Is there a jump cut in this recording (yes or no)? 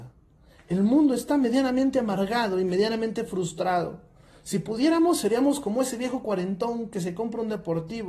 no